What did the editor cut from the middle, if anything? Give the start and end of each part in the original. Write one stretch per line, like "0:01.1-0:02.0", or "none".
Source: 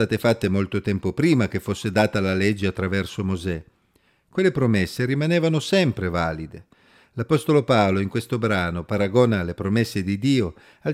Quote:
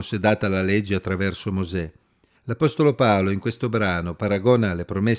0:04.1-0:07.0